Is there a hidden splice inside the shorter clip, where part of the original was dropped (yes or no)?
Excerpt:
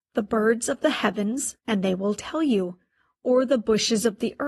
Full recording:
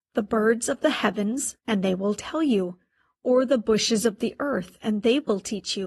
no